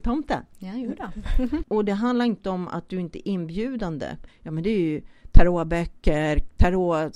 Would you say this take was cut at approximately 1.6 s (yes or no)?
yes